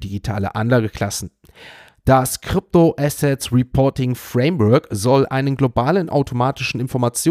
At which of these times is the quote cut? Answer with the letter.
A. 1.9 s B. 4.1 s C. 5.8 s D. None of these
A